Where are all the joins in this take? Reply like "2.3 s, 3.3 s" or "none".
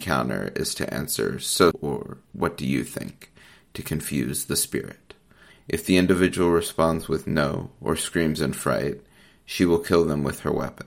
1.7 s, 5.5 s